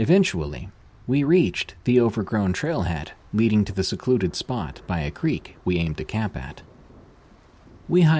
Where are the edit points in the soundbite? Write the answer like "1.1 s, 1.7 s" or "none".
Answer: none